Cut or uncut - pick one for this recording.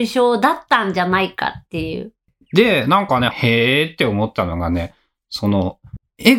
cut